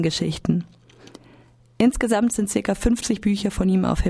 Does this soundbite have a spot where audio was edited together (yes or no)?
no